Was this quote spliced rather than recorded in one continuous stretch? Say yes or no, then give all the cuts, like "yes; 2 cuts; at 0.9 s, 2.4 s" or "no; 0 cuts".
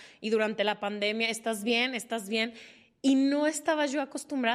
no; 0 cuts